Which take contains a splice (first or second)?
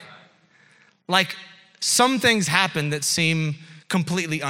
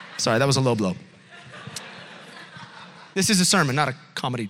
second